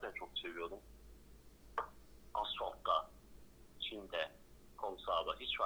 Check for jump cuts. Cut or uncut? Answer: uncut